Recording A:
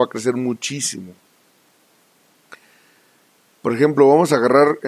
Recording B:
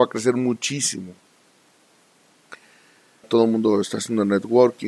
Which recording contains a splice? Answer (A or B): B